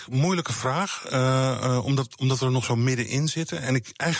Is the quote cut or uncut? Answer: uncut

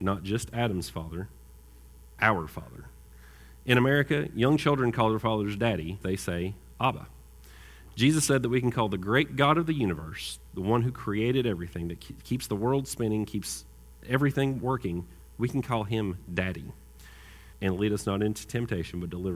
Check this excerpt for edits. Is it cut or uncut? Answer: cut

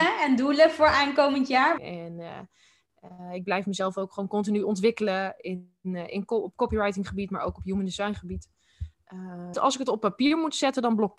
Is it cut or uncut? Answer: cut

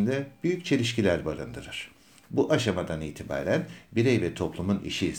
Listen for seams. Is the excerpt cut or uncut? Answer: cut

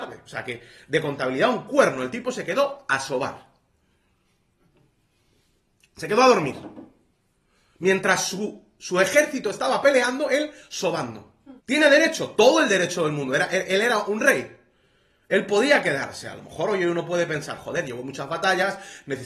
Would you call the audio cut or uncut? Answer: cut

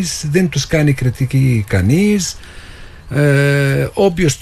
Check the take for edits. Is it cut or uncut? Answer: uncut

